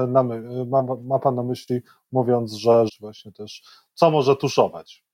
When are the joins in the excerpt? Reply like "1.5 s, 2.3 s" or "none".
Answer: 2.9 s